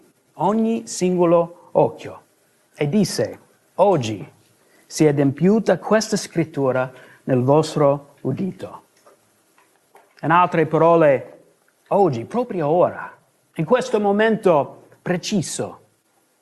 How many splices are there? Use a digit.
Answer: 0